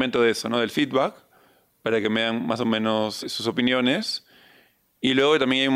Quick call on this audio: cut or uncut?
cut